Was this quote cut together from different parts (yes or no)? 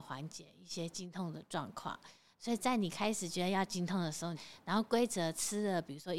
yes